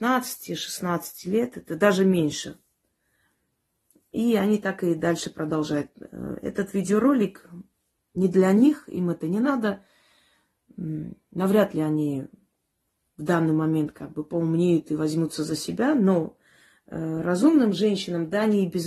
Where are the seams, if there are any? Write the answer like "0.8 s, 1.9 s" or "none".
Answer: none